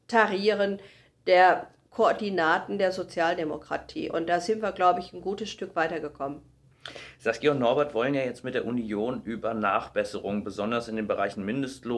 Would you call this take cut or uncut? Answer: uncut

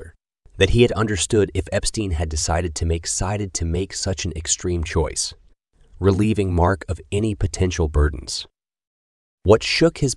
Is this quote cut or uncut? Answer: uncut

